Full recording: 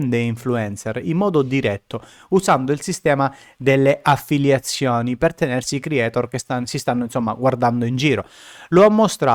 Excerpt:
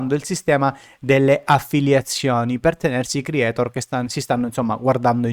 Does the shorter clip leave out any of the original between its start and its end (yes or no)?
no